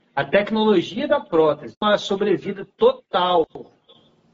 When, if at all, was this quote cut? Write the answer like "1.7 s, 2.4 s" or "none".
1.7 s